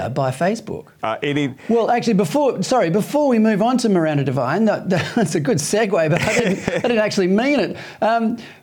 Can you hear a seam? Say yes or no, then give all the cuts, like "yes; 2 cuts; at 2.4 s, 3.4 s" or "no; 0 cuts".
yes; 1 cut; at 1.0 s